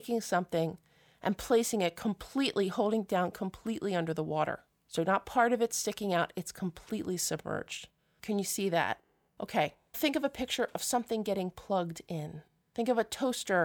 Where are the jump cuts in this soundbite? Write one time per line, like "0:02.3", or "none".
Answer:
0:09.9